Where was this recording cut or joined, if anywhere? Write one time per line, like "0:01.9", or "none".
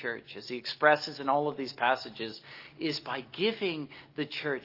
none